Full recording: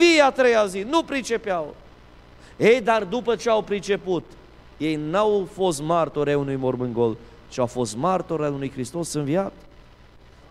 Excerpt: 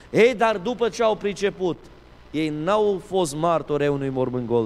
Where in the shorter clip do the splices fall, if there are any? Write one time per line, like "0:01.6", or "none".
none